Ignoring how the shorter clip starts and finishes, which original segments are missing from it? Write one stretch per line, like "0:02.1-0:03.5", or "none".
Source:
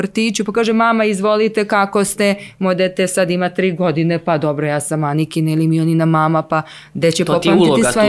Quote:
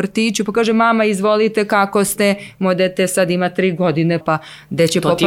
0:04.2-0:06.4

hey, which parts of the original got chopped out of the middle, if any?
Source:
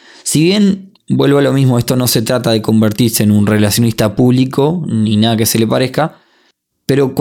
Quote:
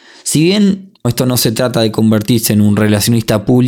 0:01.0-0:01.7

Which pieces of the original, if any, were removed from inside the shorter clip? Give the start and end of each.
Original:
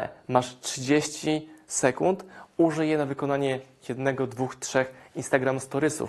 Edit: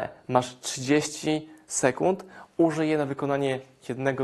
none

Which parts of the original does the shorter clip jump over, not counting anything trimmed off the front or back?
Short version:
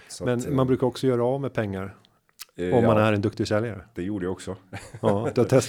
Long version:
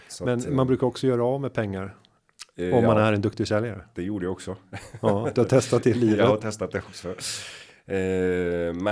none

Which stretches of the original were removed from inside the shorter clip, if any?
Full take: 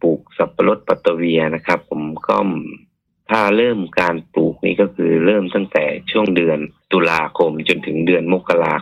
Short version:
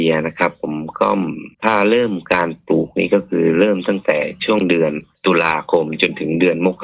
0:02.8-0:03.2

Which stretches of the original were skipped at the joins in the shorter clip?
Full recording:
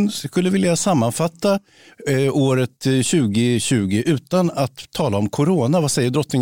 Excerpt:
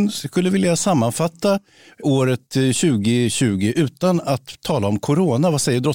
0:02.0-0:02.3

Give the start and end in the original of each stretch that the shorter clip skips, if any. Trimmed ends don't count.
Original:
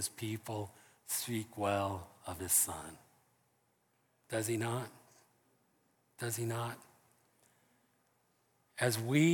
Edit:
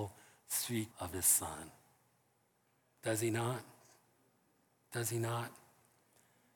0:01.5-0:02.2

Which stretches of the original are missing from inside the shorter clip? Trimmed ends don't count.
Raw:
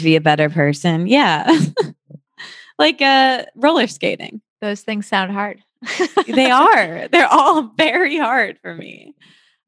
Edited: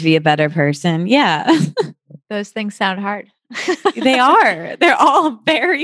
0:02.2-0:04.5

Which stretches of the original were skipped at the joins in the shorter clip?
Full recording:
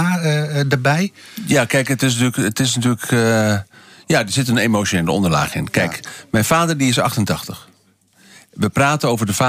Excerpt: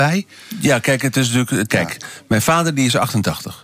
0:02.5-0:05.7

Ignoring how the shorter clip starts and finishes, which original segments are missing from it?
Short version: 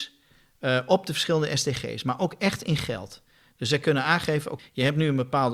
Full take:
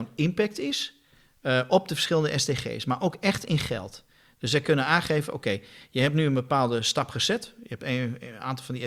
0:05.4-0:05.8

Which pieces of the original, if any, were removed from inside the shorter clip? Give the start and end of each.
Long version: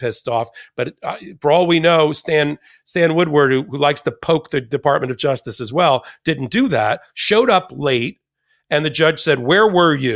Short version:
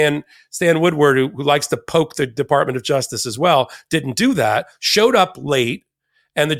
none

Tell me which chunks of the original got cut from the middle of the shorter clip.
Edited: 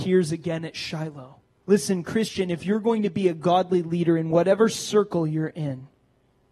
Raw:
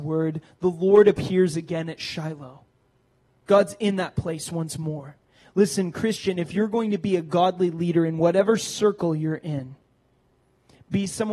0:02.9-0:05.5

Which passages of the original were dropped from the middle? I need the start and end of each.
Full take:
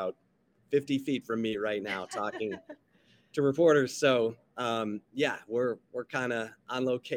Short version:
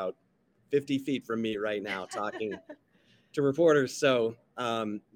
none

